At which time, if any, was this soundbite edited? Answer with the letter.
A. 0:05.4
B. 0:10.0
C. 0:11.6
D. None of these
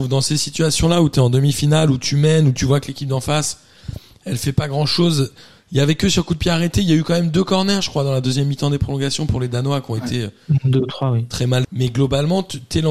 C